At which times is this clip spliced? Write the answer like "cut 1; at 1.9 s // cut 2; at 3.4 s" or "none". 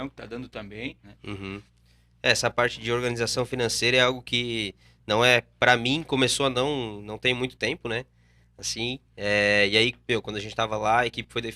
cut 1; at 1.0 s